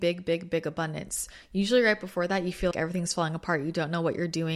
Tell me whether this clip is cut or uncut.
cut